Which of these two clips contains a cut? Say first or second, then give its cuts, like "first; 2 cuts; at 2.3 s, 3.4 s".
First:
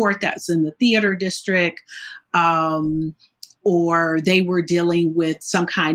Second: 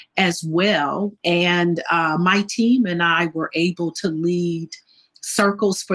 second; 1 cut; at 1.2 s